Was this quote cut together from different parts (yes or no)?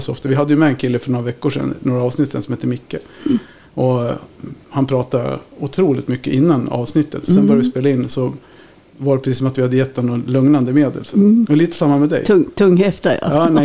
no